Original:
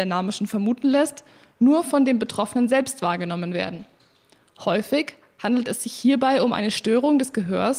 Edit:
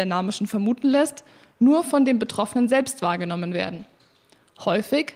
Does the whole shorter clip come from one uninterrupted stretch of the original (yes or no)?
yes